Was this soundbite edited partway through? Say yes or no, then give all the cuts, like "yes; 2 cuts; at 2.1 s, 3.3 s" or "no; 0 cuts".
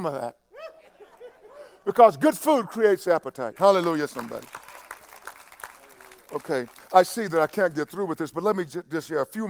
yes; 1 cut; at 3.6 s